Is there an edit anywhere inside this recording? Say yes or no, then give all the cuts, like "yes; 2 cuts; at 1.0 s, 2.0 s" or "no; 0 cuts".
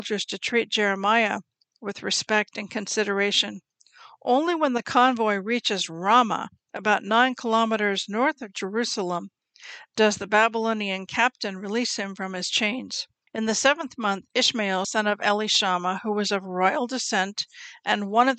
yes; 2 cuts; at 13.3 s, 14.8 s